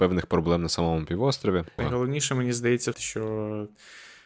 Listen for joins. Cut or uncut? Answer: cut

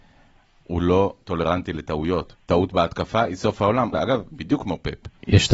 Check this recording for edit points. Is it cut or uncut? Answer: cut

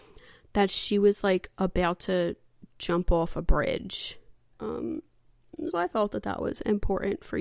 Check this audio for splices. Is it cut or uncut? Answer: cut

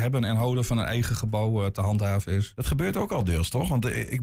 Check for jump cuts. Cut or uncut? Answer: uncut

